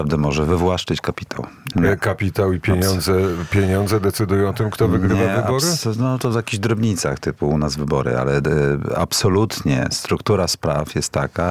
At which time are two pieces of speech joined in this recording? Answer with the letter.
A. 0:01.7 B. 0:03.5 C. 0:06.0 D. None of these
A